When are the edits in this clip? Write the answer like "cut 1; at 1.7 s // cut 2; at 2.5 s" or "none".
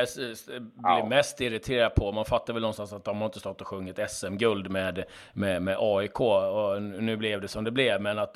none